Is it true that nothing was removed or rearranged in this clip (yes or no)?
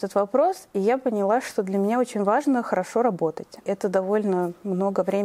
no